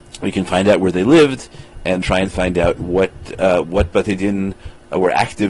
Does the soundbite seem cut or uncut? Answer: cut